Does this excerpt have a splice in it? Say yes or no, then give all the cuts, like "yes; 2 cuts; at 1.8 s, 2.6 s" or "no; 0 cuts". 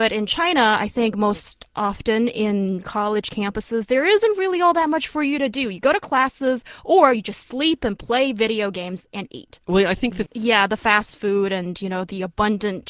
yes; 1 cut; at 10.3 s